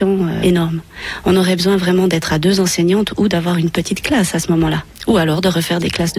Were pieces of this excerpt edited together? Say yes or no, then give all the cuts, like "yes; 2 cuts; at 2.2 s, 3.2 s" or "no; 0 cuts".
no; 0 cuts